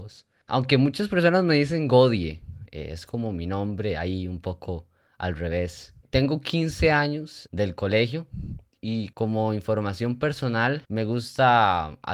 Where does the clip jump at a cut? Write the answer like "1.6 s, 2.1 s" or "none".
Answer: 7.5 s, 10.8 s